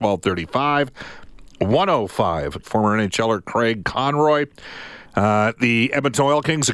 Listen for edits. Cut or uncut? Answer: cut